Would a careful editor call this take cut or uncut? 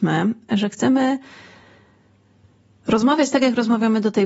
uncut